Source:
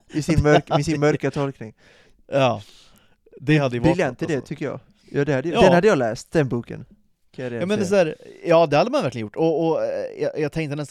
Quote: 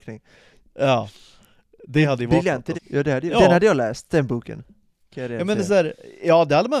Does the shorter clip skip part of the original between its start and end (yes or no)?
yes